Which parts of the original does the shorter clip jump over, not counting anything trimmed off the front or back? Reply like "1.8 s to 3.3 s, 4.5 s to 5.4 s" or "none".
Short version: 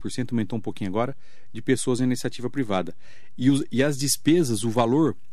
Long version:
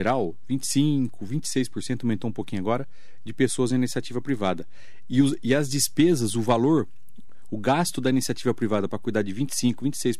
none